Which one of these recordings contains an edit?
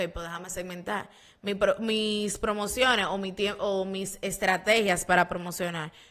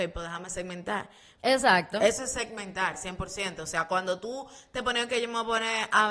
second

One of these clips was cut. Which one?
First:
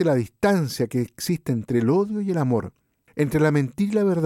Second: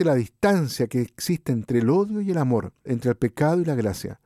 second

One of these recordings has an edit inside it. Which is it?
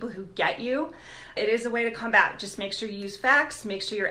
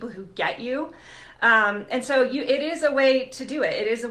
first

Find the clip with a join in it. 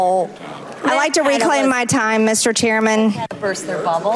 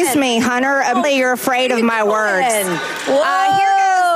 second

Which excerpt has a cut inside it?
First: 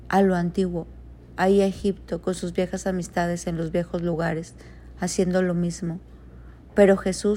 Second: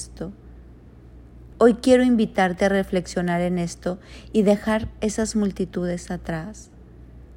second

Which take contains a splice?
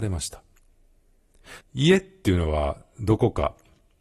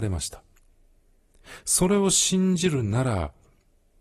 first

